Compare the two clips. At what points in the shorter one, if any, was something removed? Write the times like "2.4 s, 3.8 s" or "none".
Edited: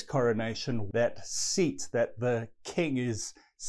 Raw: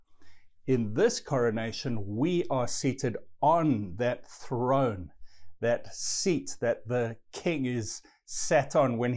0.9 s